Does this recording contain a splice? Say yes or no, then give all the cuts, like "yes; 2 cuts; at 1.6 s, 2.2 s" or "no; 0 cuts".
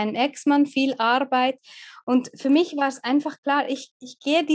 no; 0 cuts